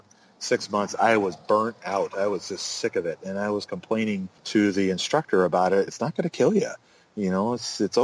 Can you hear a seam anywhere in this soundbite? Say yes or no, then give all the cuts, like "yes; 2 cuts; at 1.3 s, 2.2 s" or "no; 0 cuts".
yes; 2 cuts; at 4.4 s, 5.9 s